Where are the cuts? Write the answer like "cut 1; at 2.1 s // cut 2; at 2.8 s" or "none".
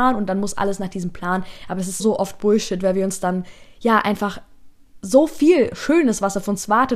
cut 1; at 2.0 s